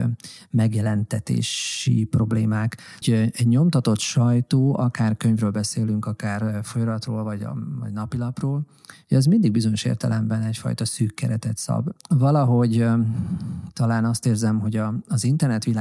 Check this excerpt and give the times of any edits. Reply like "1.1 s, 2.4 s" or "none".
3.0 s, 12.0 s